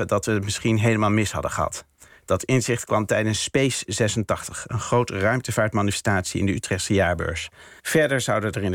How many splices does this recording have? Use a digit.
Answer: 1